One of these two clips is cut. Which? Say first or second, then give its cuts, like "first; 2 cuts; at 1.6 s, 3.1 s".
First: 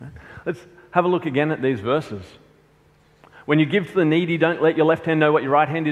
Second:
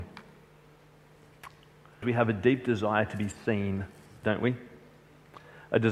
second; 1 cut; at 2.0 s